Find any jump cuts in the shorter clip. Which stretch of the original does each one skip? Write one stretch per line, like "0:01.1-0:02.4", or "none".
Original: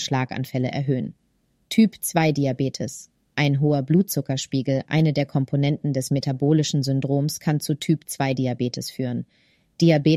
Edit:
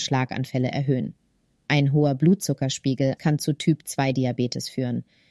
0:01.6-0:03.2
0:04.8-0:07.4